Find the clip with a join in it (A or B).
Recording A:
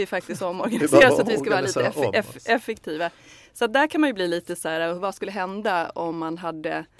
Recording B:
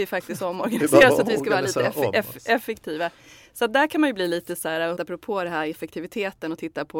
B